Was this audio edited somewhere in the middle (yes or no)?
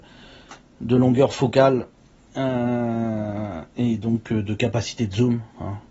no